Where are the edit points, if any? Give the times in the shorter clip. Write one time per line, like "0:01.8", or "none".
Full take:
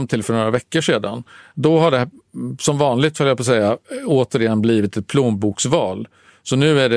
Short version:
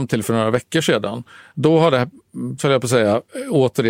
0:02.6